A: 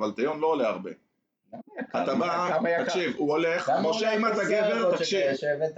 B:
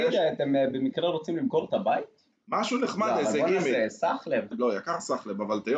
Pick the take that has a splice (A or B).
B